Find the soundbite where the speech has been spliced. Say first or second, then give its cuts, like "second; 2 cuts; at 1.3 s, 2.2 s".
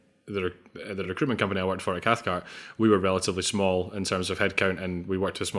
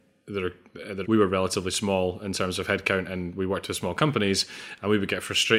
second; 1 cut; at 1.0 s